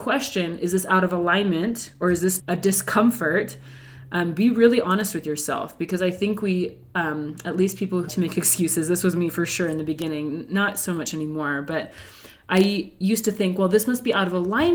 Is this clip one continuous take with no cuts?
no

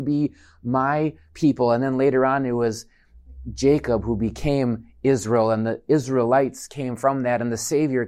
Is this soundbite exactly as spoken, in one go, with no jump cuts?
yes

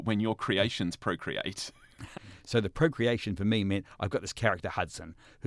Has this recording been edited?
yes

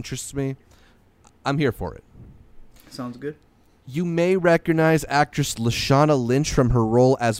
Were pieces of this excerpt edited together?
no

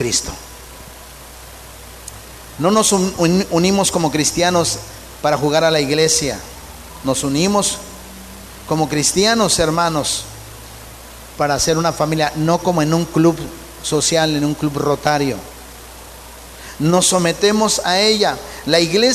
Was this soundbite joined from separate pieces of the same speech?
no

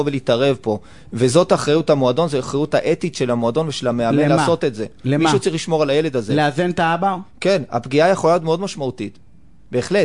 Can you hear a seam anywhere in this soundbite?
no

